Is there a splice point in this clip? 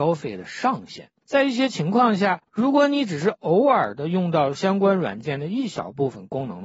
yes; 1 cut; at 1.2 s

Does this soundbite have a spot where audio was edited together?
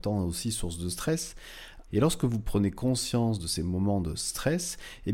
yes; 1 cut; at 1.9 s

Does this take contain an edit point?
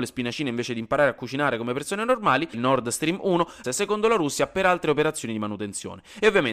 yes; 2 cuts; at 2.5 s, 3.6 s

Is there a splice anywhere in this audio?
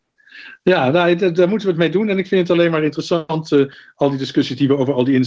no; 0 cuts

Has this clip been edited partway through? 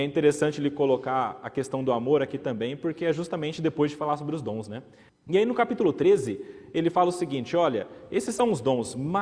yes; 1 cut; at 5.1 s

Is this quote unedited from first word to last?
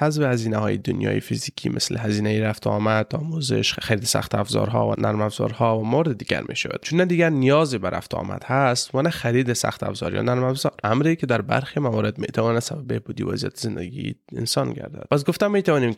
yes; 0 cuts

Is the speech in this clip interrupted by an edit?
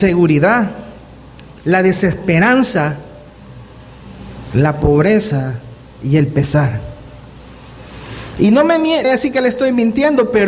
yes; 2 cuts; at 1.6 s, 9.0 s

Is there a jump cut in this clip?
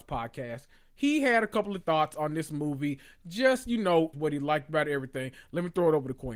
yes; 1 cut; at 4.1 s

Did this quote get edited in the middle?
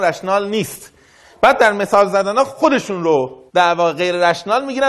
yes; 1 cut; at 3.5 s

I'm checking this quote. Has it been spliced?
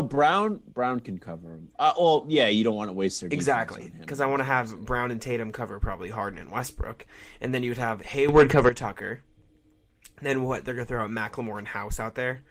no; 0 cuts

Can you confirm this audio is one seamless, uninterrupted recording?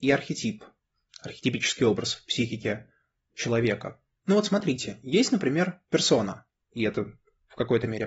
no; 2 cuts; at 4.2 s, 6.6 s

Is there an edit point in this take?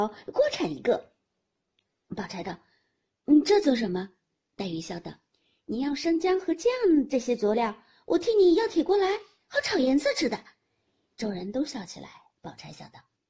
no; 0 cuts

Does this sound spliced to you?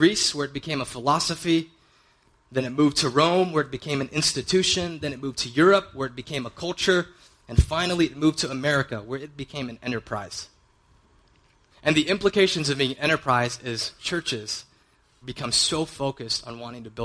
yes; 2 cuts; at 11.7 s, 15.2 s

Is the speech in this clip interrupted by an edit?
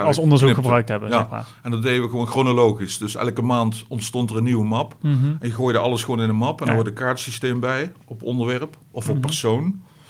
no; 0 cuts

